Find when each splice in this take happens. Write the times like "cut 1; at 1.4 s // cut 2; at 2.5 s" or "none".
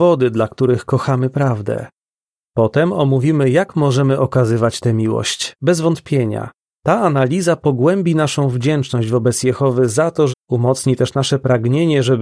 cut 1; at 5.6 s // cut 2; at 10.3 s